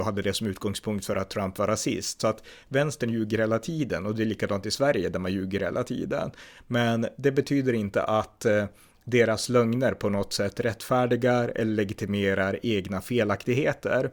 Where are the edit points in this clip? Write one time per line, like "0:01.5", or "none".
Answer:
none